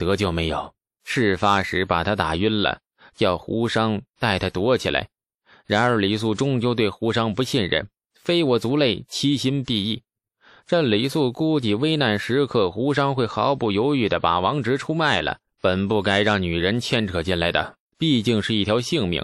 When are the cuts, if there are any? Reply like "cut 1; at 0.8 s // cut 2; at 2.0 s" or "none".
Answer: cut 1; at 15.4 s // cut 2; at 17.9 s